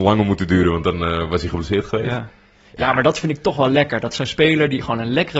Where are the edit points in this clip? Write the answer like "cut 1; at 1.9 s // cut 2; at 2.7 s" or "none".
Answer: none